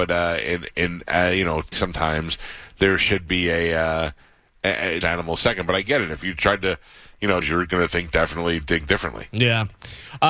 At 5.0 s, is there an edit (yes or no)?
yes